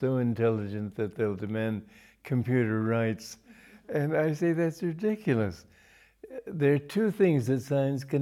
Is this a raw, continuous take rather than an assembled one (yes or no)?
yes